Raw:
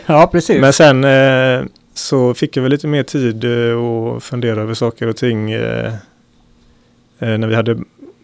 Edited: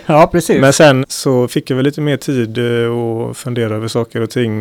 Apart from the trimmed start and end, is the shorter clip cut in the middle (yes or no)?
yes